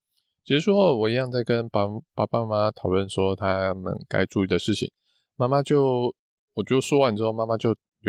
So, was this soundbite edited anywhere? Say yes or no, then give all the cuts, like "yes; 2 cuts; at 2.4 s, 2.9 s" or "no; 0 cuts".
no; 0 cuts